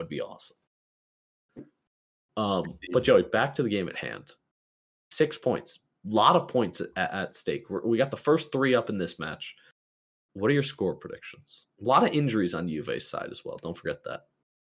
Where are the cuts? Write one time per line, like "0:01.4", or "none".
none